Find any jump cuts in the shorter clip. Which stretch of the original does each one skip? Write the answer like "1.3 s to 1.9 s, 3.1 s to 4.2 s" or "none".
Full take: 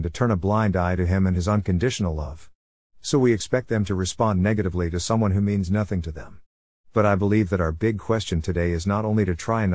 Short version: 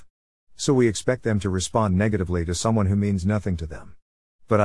none